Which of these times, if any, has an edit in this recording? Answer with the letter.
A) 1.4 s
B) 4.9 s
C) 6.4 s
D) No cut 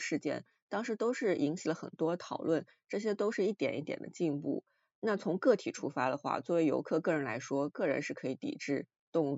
D